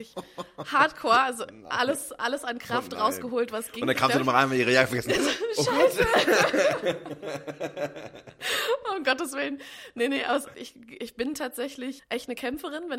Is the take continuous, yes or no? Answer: no